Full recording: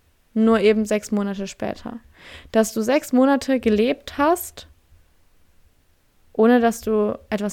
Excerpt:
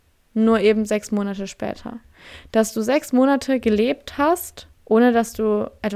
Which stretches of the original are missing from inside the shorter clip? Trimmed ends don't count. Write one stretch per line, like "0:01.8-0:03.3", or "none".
0:04.8-0:06.3